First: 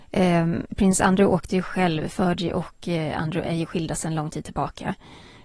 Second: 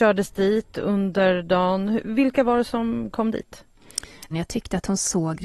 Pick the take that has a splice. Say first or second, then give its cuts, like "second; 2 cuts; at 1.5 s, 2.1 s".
second; 1 cut; at 4.3 s